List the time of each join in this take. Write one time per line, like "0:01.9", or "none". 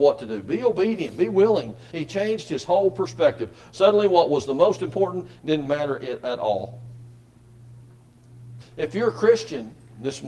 0:01.9
0:08.6